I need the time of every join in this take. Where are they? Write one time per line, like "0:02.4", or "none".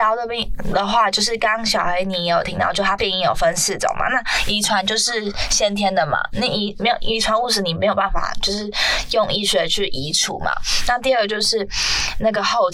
0:03.0